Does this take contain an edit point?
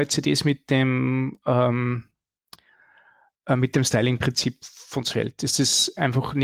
no; 0 cuts

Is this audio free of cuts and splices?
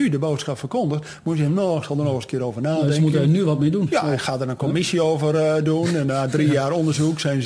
yes; 0 cuts

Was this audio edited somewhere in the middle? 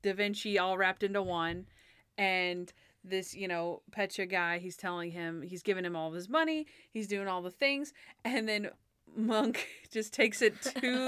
no; 0 cuts

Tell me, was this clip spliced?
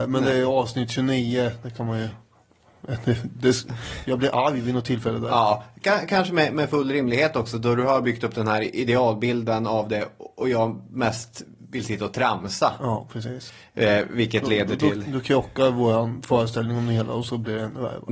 no; 0 cuts

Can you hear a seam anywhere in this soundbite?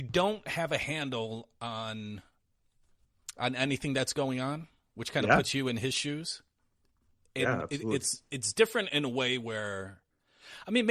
no; 0 cuts

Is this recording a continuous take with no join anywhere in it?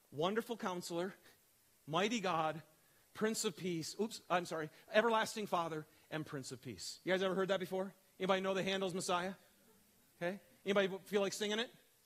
yes; 0 cuts

